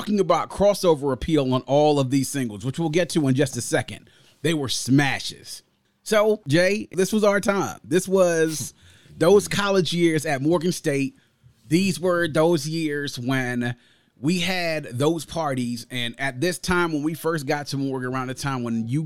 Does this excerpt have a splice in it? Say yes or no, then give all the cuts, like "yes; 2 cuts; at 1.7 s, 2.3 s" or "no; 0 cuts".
yes; 1 cut; at 6.4 s